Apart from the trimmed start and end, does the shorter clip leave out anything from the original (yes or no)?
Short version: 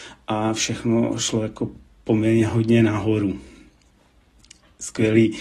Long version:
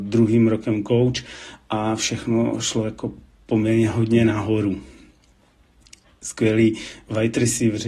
no